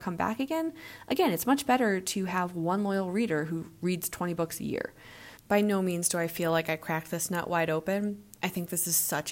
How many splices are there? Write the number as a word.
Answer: one